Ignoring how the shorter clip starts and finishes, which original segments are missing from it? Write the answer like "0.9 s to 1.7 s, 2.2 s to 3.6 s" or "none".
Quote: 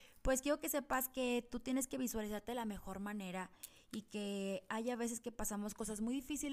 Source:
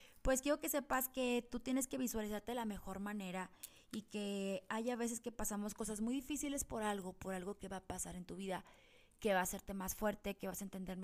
none